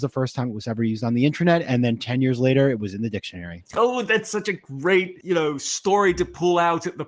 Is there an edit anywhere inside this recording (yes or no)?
no